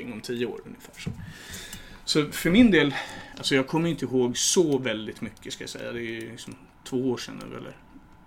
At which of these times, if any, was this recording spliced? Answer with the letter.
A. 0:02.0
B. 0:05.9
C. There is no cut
C